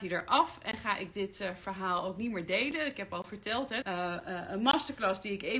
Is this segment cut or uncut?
cut